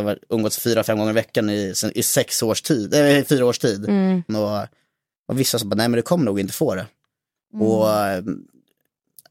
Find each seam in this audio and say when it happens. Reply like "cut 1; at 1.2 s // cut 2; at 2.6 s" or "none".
cut 1; at 4.3 s // cut 2; at 7.4 s